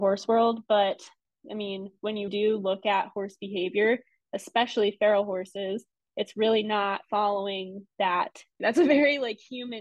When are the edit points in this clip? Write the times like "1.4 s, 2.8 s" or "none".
2.3 s, 8.6 s

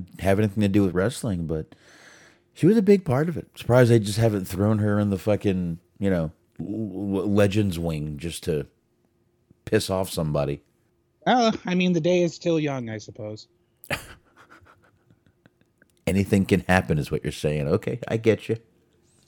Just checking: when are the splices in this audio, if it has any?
none

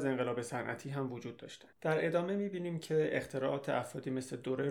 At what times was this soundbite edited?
1.7 s

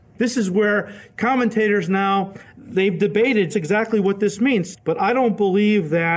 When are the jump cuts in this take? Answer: 3.5 s, 4.7 s

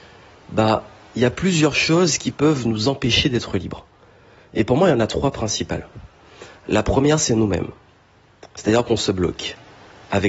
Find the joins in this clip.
none

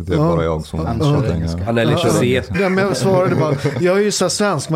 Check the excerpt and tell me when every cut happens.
2.5 s

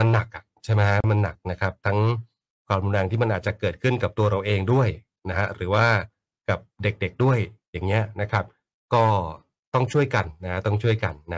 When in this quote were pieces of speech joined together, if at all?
none

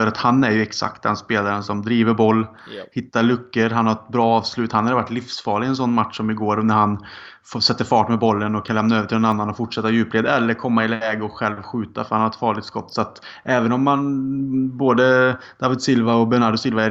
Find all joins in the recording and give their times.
none

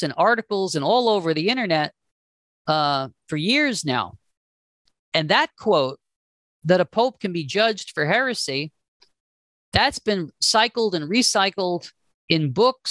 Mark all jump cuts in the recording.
5.0 s

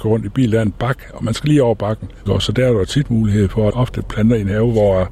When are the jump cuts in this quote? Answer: 2.3 s, 3.7 s

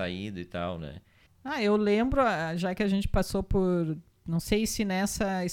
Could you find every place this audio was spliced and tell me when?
1.3 s

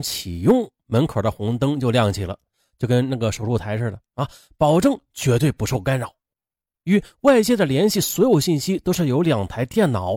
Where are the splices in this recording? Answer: 6.7 s

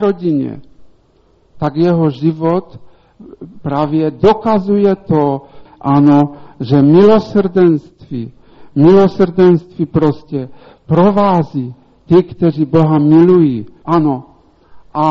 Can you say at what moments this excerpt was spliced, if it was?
5.6 s, 13.8 s

